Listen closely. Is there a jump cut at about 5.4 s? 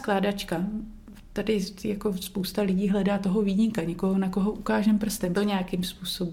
yes; 1 cut; at 5.4 s

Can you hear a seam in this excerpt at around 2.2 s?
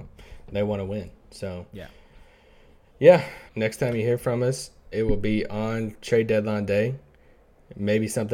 no; 2 cuts; at 3.5 s, 4.9 s

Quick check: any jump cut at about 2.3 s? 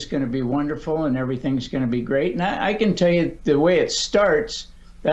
no; 0 cuts

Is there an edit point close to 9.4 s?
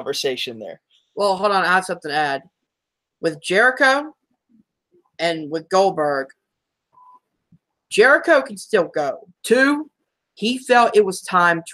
yes; 1 cut; at 9.4 s

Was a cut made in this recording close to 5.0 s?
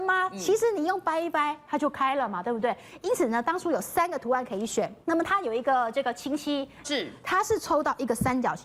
yes; 2 cuts; at 5.0 s, 6.8 s

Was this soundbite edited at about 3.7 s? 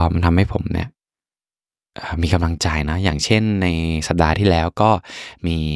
no; 0 cuts

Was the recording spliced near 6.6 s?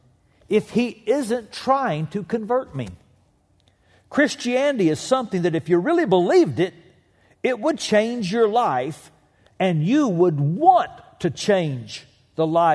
no; 0 cuts

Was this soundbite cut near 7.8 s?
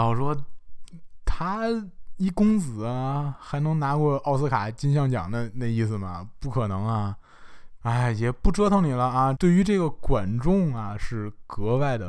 yes; 2 cuts; at 7.8 s, 9.4 s

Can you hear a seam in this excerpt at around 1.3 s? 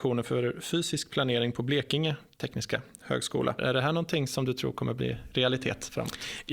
no; 1 cut; at 3.6 s

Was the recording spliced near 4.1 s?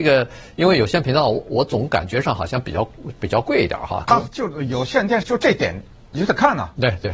yes; 2 cuts; at 4.1 s, 5.2 s

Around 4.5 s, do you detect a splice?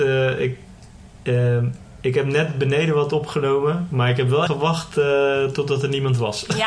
yes; 1 cut; at 4.5 s

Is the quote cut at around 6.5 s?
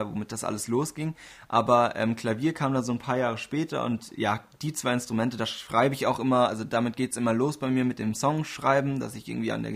no; 0 cuts

